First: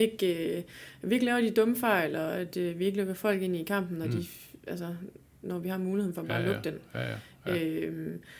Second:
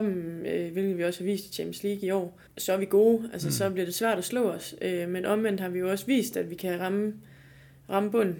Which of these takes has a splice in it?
second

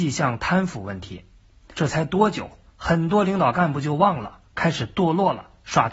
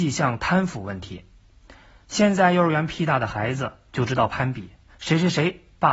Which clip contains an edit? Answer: first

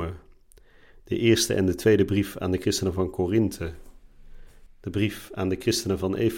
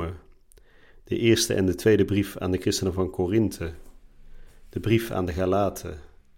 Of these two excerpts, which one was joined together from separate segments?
first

